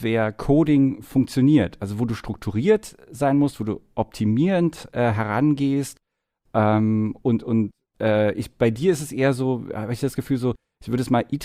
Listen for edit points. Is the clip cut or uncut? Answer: uncut